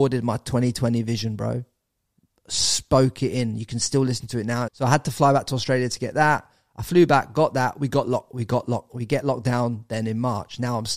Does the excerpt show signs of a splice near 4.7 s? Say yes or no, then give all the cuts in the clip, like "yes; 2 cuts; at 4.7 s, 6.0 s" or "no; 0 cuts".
yes; 1 cut; at 4.7 s